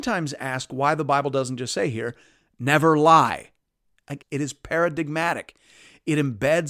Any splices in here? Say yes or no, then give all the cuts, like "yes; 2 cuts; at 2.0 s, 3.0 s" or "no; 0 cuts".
yes; 1 cut; at 4.2 s